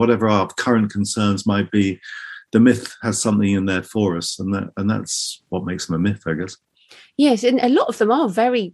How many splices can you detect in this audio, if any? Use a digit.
0